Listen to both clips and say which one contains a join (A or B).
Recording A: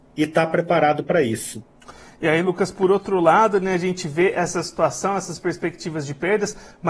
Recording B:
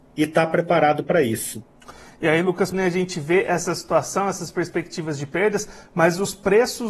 B